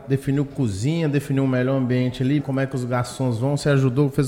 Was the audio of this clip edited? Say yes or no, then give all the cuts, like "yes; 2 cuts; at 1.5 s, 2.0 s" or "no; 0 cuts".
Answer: yes; 1 cut; at 2.4 s